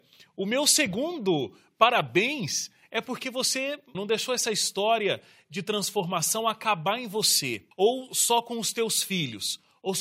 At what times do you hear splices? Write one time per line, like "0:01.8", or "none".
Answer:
0:03.9
0:07.7